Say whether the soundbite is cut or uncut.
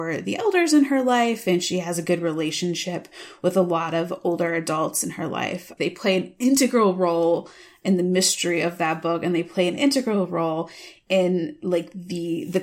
cut